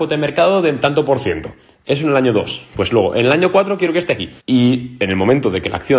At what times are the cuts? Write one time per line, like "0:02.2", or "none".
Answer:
0:04.4